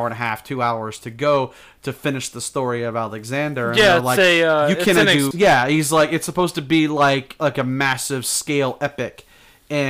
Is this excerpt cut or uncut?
cut